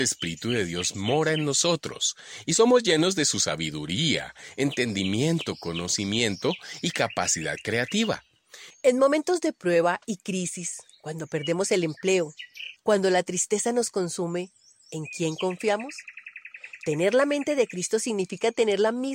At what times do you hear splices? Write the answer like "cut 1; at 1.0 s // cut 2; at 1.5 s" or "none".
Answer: cut 1; at 8.7 s // cut 2; at 12.8 s

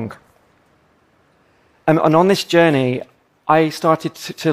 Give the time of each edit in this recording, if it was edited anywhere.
none

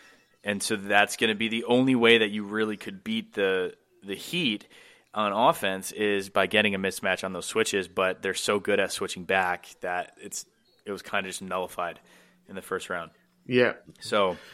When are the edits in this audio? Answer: none

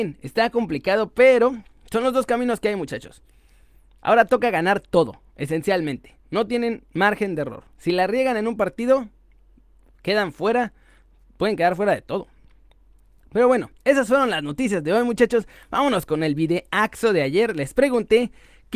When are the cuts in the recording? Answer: none

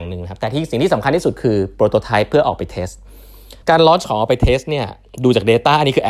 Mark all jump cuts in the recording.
cut 1; at 3.6 s

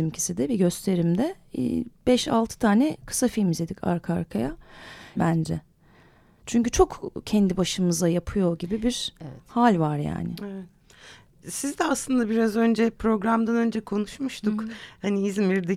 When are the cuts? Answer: cut 1; at 5.2 s

